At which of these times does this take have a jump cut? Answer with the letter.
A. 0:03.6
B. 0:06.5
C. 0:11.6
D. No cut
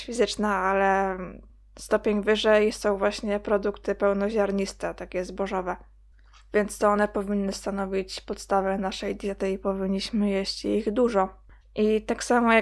C